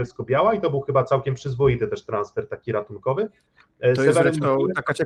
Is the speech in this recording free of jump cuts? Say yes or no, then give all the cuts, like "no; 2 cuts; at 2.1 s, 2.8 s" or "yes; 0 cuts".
yes; 0 cuts